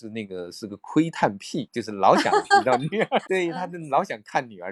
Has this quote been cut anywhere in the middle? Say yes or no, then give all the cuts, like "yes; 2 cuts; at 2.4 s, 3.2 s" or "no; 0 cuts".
yes; 1 cut; at 3.3 s